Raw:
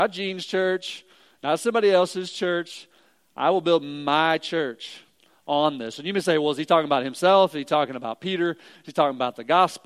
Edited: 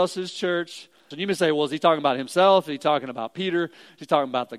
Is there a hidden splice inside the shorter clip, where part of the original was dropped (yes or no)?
yes